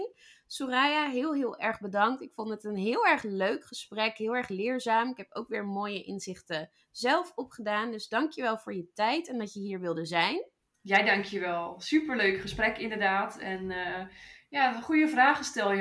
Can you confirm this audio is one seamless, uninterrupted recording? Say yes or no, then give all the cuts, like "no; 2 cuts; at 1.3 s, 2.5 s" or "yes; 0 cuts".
yes; 0 cuts